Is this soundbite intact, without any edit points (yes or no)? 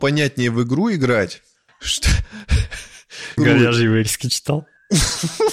no